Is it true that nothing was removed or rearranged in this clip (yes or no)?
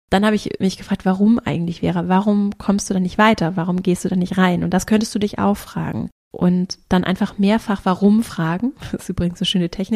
yes